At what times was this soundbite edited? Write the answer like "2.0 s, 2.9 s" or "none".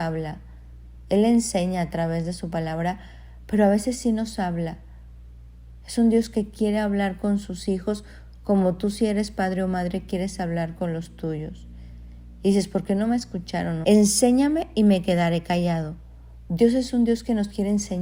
12.4 s, 13.8 s, 16.5 s